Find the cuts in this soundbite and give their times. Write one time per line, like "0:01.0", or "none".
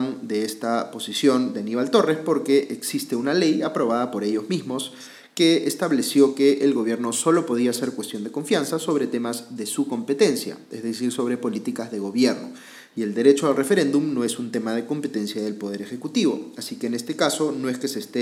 none